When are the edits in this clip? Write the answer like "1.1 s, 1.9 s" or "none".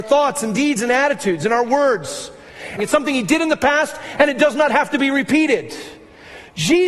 2.8 s